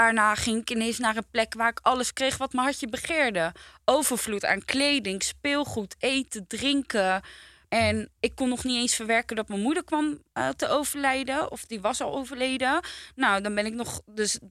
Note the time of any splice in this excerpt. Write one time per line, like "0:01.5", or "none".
0:07.6